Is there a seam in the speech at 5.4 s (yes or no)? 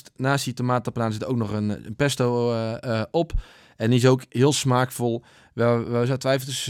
no